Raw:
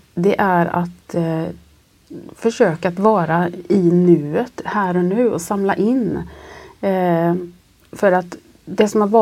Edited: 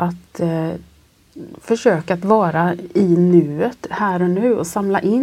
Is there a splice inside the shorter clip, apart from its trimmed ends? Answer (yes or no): no